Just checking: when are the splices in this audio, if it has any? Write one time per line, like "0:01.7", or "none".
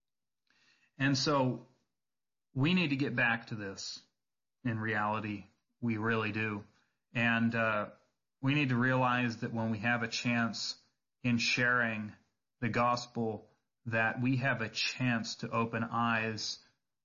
none